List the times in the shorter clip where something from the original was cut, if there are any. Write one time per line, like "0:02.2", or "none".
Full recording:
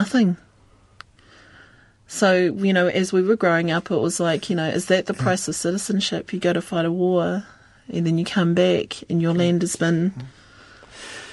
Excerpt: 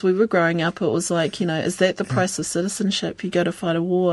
none